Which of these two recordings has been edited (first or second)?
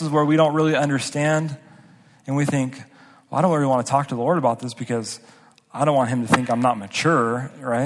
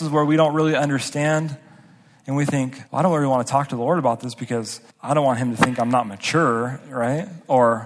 second